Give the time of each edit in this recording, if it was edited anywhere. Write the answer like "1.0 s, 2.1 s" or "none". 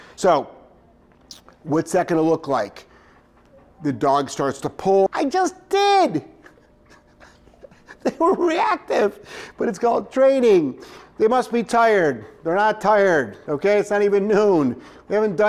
5.1 s